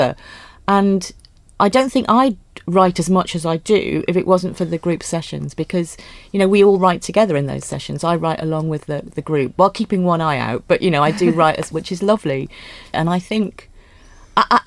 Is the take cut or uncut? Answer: cut